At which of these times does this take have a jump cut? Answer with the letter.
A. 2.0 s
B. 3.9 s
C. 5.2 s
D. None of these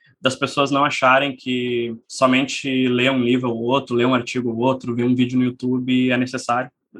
A